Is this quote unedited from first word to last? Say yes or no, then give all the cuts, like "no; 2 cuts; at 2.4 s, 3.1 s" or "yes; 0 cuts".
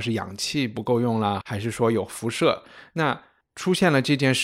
no; 1 cut; at 1.4 s